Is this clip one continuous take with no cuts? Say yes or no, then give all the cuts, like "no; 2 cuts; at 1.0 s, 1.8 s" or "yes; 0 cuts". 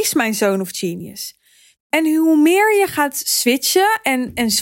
no; 1 cut; at 1.8 s